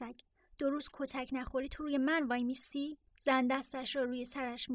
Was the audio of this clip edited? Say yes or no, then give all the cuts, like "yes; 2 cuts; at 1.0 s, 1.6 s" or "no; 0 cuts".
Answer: yes; 1 cut; at 3.1 s